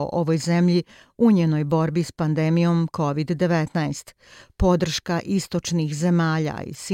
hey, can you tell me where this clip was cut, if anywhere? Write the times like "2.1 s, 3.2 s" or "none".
none